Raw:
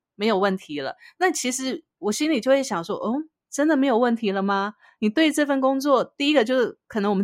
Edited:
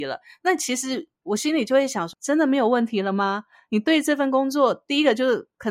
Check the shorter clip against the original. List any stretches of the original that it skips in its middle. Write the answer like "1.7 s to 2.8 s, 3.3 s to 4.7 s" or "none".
2.9 s to 3.4 s